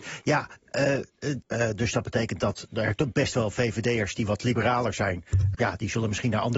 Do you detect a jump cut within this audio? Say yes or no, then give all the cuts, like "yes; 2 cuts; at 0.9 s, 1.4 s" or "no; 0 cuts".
yes; 2 cuts; at 1.5 s, 5.5 s